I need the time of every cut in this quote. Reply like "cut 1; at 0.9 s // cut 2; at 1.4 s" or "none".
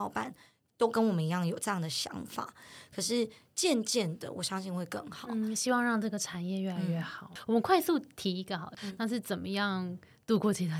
cut 1; at 8.8 s